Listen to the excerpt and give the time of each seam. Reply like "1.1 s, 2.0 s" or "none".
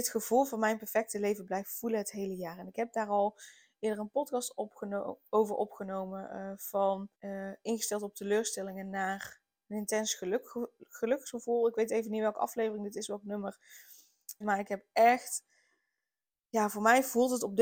7.1 s, 14.4 s